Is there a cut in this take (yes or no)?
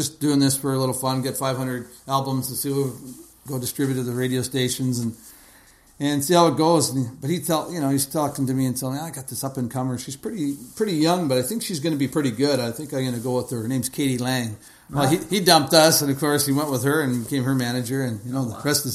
no